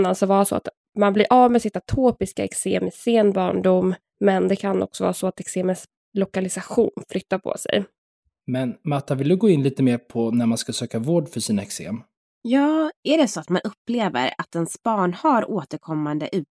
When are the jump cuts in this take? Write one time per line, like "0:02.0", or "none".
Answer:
0:08.4